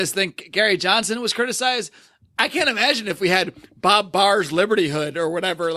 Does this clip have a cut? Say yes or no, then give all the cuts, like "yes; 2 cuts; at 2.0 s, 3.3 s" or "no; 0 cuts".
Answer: no; 0 cuts